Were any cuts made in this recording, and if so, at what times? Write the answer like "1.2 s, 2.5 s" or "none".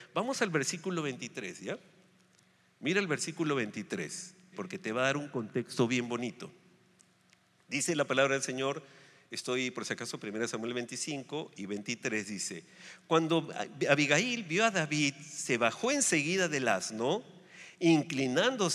4.5 s